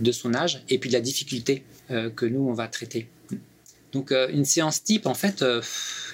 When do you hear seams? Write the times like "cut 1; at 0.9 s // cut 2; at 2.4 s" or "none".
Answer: none